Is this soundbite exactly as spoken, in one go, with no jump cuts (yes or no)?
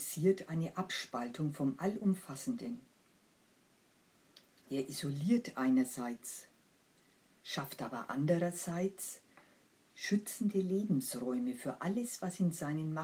no